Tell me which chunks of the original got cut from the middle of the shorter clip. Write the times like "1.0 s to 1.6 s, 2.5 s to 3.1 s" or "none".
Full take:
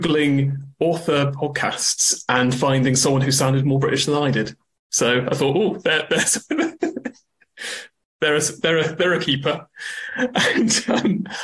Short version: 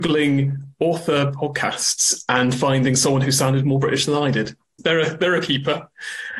4.8 s to 8.6 s